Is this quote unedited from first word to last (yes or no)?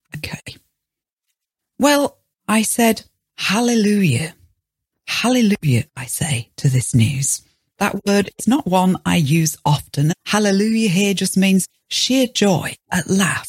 no